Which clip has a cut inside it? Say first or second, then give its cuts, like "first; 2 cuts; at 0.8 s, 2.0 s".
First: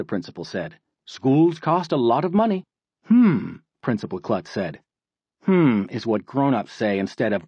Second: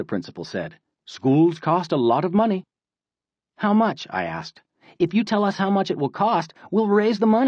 first; 1 cut; at 2.9 s